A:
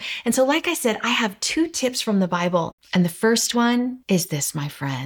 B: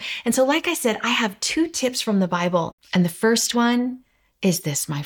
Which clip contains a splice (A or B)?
A